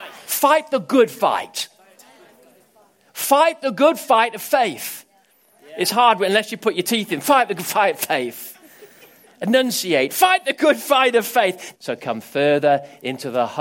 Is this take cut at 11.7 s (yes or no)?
yes